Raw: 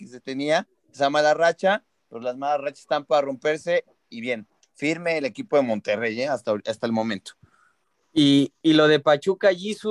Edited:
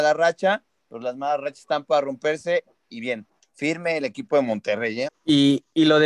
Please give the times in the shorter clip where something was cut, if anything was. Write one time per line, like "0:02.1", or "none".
0:05.1